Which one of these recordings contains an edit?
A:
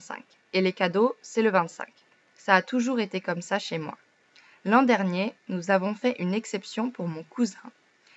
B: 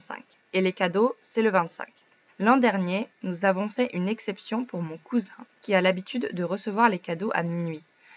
B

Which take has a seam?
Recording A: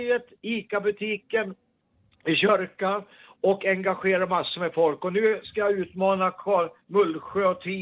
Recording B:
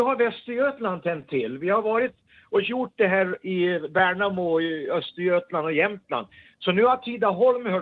B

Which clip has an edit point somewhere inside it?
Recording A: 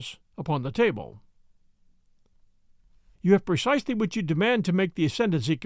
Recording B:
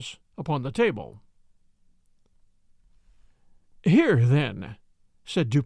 A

